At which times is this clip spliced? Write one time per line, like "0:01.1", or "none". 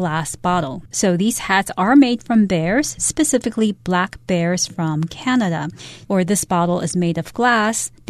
0:00.9
0:06.0